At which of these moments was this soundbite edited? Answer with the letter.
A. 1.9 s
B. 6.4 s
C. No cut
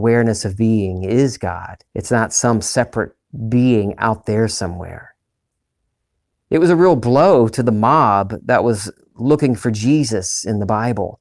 A